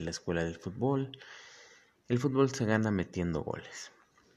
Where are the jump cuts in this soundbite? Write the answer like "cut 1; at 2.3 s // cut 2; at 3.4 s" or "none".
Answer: none